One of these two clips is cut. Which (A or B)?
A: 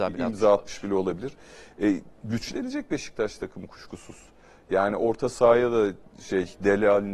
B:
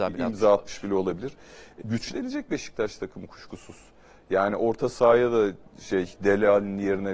B